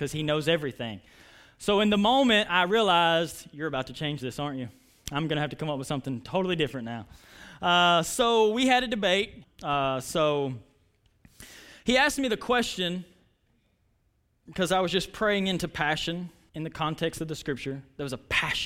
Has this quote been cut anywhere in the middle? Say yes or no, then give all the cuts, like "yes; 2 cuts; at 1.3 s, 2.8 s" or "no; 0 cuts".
yes; 2 cuts; at 9.4 s, 16.5 s